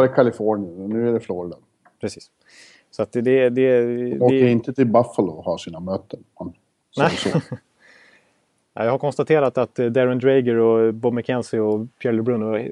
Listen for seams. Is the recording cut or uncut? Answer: uncut